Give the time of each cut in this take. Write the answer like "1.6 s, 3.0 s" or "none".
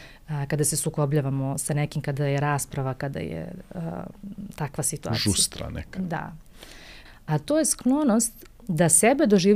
7.0 s